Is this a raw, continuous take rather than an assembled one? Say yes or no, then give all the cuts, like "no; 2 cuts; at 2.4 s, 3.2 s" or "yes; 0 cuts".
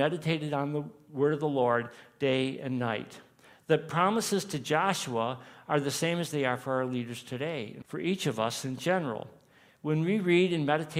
no; 1 cut; at 7.8 s